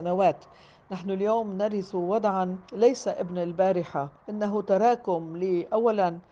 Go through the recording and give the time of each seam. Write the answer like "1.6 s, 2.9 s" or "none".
2.6 s, 4.2 s